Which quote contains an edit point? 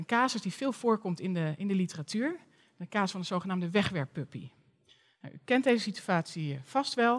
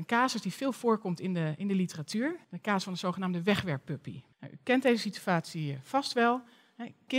second; 2 cuts; at 2.4 s, 4.3 s

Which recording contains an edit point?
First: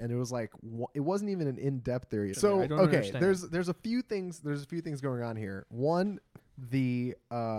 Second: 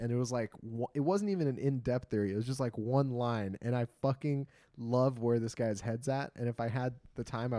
first; 2 cuts; at 2.3 s, 6.4 s

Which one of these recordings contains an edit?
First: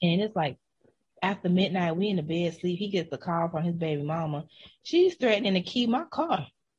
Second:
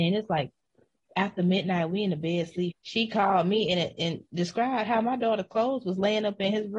second; 1 cut; at 2.7 s

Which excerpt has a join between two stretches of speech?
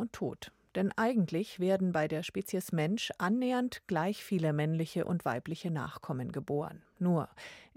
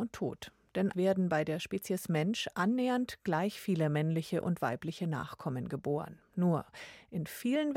second; 1 cut; at 0.9 s

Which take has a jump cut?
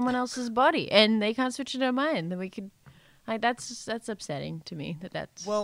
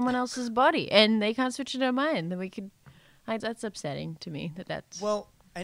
second; 1 cut; at 3.4 s

